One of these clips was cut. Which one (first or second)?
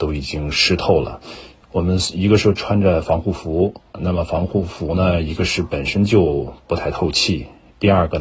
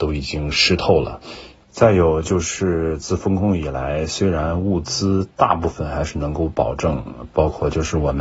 second